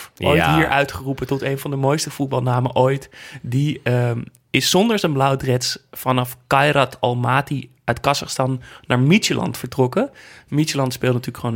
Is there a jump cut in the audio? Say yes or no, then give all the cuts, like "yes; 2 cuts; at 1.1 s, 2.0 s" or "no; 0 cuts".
no; 0 cuts